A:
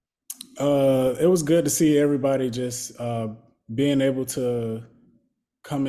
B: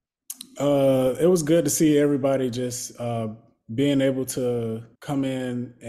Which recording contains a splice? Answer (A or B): B